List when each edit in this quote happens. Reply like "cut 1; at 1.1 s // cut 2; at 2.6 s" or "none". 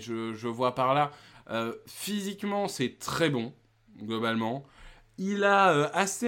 cut 1; at 1.3 s